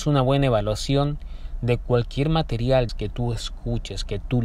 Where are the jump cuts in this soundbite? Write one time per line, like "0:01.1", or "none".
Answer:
0:02.9